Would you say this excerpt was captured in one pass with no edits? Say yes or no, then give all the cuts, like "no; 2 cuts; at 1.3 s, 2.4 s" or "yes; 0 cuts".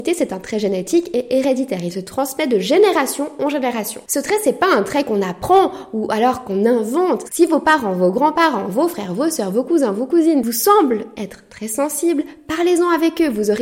no; 1 cut; at 7.2 s